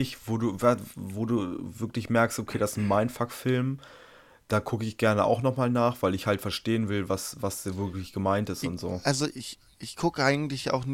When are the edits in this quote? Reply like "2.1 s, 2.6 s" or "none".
none